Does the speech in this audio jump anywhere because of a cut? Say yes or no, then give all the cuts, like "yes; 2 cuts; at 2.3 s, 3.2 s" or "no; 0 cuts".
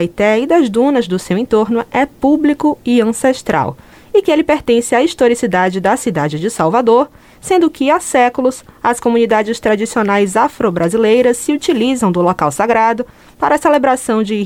no; 0 cuts